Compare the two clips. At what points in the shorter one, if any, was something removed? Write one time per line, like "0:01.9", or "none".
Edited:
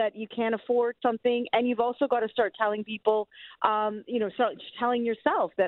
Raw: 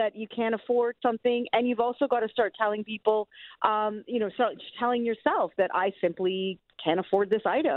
none

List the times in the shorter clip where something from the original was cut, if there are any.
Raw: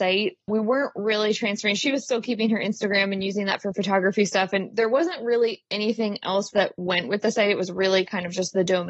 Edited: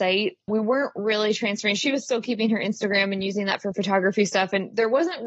none

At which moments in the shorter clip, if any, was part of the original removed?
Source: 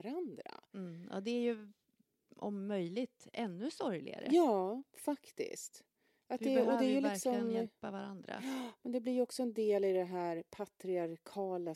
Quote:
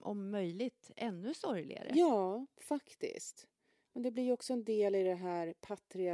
0:03.9

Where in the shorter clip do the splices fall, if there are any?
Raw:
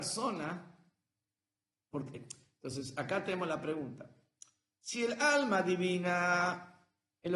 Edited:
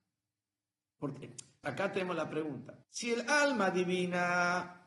0:01.6
0:02.8

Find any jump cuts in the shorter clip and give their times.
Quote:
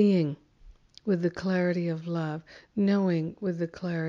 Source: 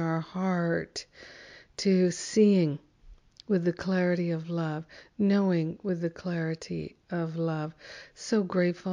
none

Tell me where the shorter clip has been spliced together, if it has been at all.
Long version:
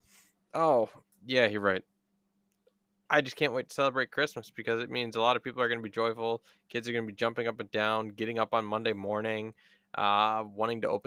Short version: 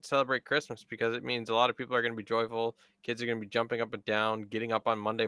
none

